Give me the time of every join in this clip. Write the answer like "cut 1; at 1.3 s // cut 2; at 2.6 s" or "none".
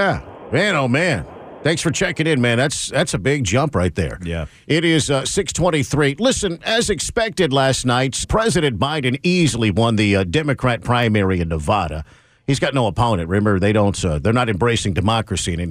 cut 1; at 8.2 s